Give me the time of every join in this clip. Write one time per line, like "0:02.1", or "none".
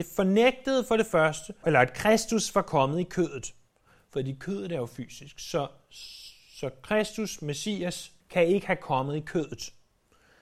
0:01.6
0:08.2

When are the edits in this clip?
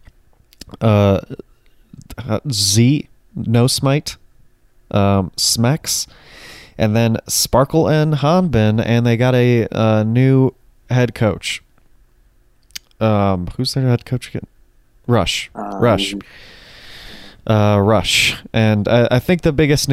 none

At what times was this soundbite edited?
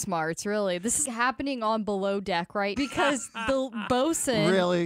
0:01.1
0:02.8

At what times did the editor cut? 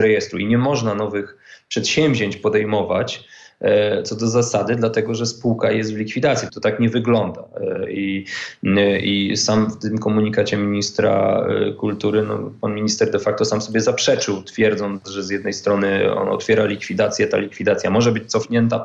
0:06.5

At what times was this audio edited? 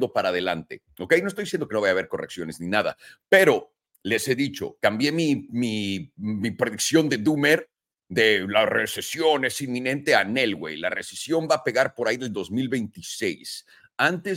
none

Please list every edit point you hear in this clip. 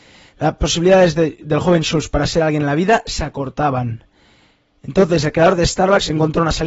none

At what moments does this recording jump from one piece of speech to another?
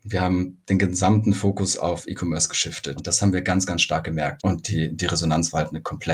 0:03.0
0:04.4

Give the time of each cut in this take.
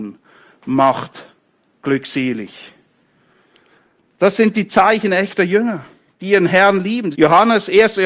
0:07.1

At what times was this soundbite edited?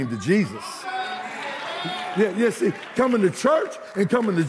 none

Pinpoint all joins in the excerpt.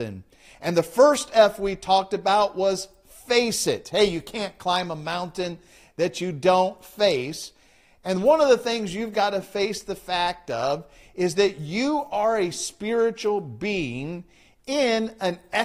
none

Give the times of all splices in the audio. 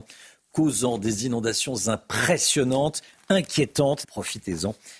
0:04.0

